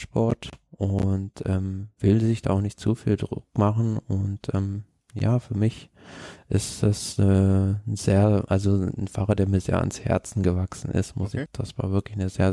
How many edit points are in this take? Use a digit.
1